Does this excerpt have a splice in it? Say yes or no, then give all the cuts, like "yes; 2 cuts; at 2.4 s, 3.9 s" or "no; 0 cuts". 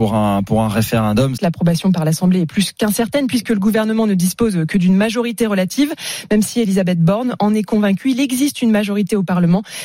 yes; 1 cut; at 1.4 s